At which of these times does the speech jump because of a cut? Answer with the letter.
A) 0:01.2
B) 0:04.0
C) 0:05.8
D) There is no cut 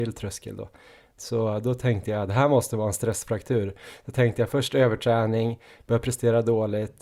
A